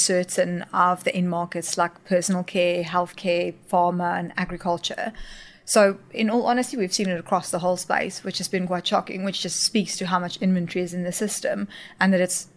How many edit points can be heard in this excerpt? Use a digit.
0